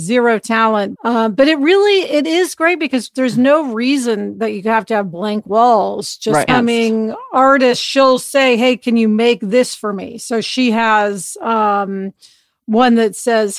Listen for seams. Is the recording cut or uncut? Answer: cut